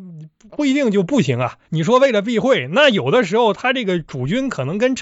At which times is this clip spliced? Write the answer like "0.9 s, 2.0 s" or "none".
1.6 s

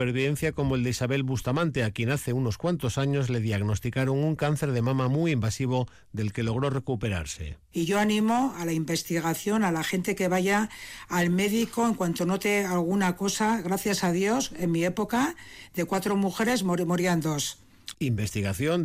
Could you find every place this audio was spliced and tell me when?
7.7 s, 17.9 s

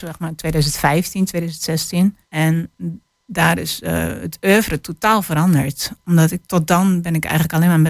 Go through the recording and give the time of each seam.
2.3 s

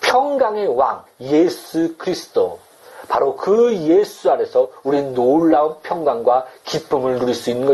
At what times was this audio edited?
1.1 s

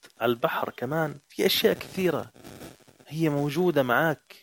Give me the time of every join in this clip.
1.2 s

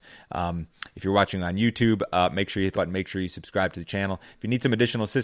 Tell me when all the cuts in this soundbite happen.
2.7 s

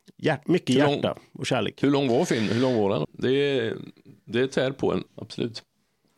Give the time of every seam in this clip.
3.0 s, 5.1 s

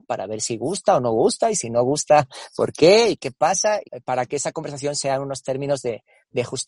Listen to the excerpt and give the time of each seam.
3.8 s

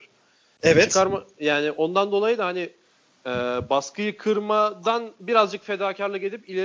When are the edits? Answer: none

